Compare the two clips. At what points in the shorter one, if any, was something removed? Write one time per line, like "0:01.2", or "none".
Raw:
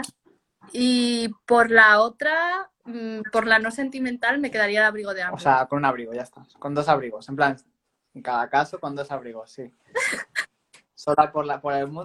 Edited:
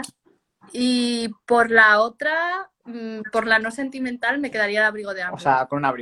none